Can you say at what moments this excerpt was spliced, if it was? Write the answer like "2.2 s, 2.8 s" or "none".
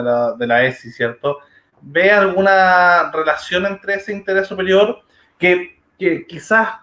none